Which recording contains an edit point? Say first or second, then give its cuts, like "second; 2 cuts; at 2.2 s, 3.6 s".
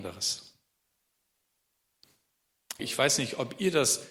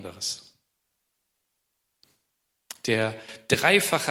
first; 1 cut; at 2.8 s